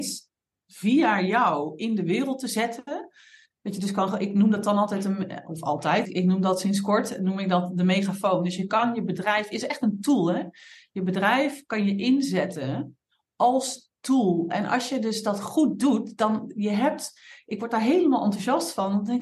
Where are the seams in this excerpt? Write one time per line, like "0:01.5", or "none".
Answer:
0:06.0